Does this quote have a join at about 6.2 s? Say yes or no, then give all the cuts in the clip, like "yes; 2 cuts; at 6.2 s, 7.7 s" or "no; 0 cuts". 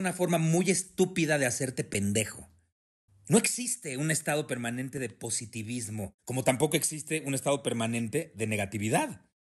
yes; 2 cuts; at 3.1 s, 6.2 s